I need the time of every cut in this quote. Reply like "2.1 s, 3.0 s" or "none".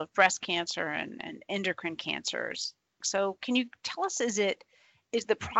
3.0 s

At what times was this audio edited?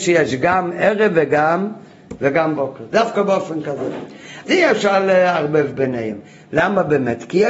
4.4 s

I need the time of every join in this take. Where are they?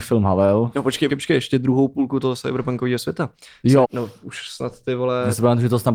1.1 s, 3.8 s

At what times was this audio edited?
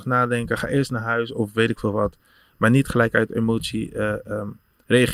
none

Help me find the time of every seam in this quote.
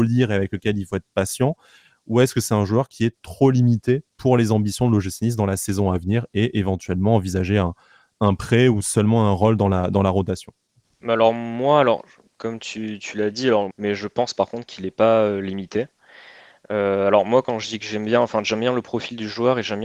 13.7 s

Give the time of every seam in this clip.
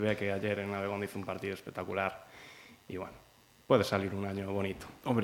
none

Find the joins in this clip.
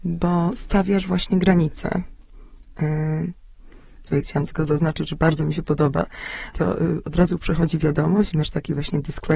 4.0 s, 6.5 s

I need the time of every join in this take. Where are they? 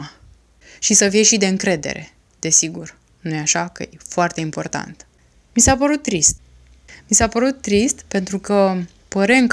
none

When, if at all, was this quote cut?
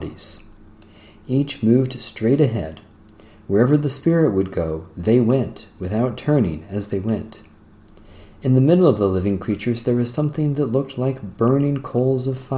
none

